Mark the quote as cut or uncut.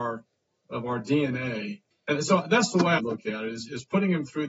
cut